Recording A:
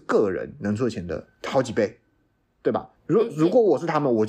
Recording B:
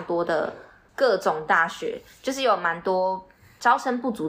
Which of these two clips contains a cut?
A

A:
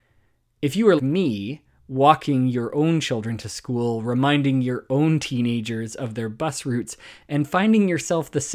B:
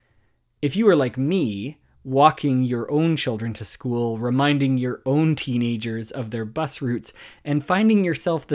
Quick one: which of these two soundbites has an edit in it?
A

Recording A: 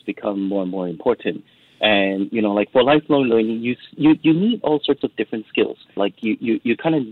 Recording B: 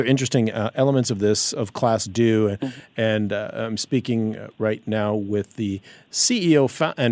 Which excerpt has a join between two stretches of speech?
A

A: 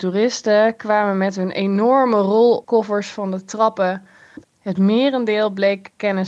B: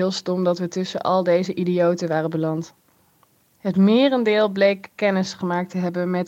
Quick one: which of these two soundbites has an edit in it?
A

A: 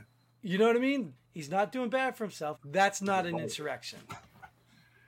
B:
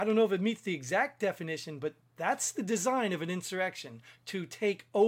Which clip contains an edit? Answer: A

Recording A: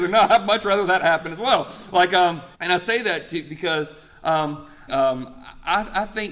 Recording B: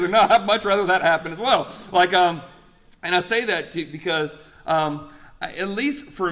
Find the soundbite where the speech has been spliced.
A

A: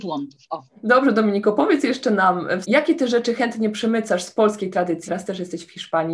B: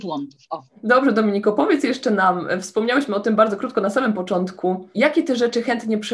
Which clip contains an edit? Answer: A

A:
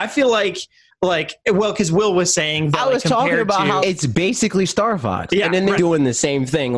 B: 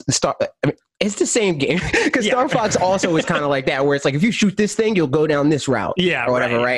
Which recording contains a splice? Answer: A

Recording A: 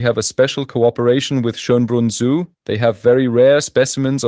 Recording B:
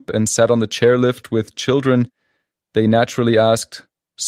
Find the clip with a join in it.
A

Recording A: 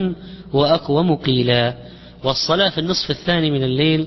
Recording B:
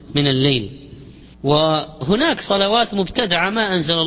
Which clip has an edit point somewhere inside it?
B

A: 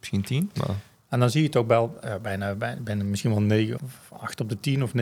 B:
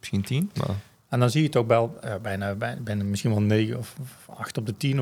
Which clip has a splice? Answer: A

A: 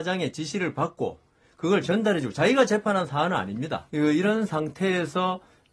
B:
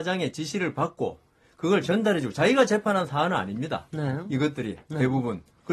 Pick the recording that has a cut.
A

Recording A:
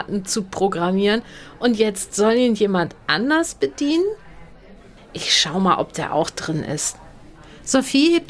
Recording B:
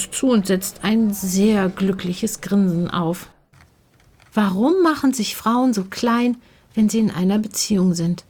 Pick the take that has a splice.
A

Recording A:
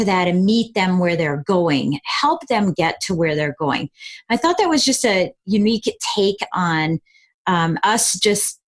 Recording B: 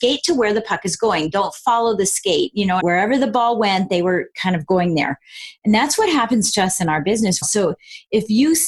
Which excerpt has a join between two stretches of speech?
B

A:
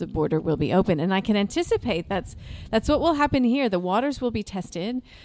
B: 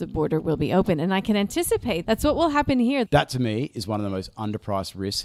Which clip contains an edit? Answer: B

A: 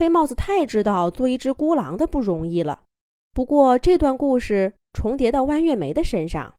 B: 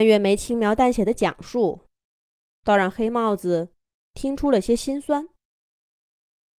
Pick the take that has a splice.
A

